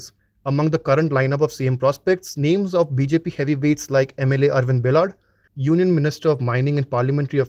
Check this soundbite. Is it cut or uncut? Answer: cut